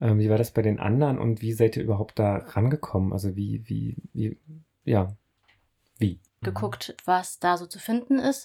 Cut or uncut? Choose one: cut